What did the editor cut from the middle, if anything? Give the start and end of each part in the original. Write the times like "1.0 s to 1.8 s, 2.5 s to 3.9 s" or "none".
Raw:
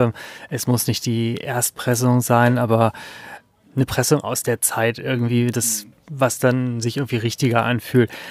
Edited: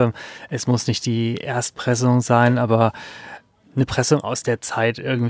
none